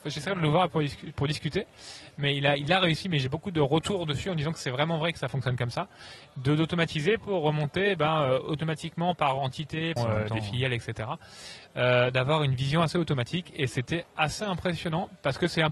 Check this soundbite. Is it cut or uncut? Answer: cut